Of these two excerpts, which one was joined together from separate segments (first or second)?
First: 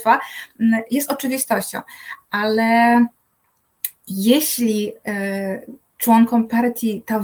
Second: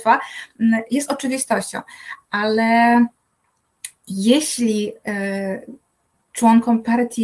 first